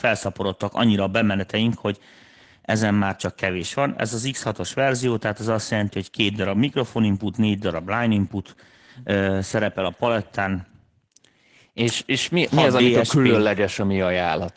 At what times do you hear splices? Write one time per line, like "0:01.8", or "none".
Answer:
none